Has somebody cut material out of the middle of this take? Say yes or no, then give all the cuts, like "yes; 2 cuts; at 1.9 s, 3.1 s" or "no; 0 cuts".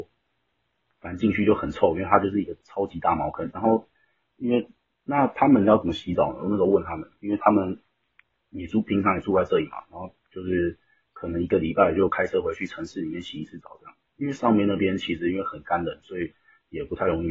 yes; 1 cut; at 3.5 s